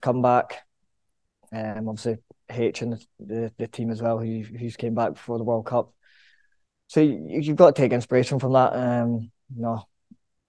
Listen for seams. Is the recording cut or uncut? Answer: uncut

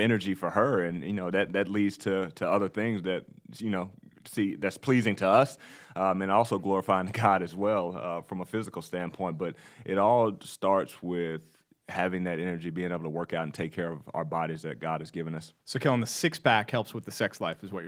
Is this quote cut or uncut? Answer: cut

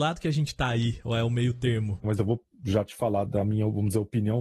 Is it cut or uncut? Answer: cut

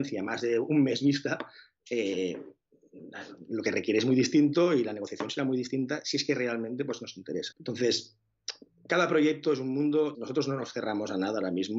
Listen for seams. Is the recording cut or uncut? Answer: cut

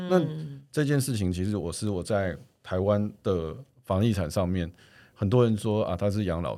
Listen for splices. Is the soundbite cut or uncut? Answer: uncut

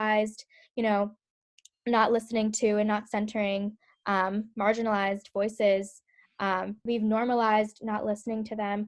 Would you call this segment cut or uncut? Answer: cut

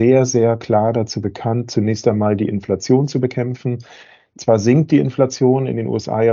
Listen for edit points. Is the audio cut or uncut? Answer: uncut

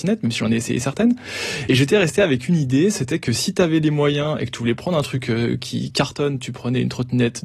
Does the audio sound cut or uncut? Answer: uncut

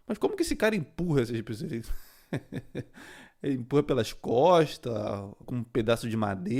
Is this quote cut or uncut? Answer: cut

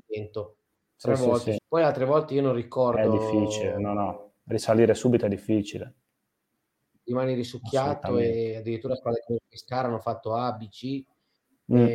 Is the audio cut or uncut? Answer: cut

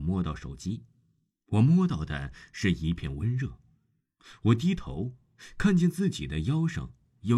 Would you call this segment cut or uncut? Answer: uncut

